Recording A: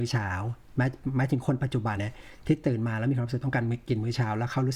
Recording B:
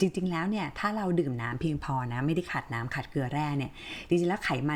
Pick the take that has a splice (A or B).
A